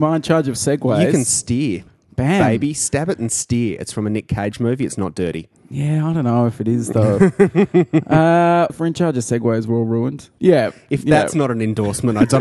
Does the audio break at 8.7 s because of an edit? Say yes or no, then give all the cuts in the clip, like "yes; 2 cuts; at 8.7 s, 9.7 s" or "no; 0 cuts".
yes; 2 cuts; at 8.7 s, 10.4 s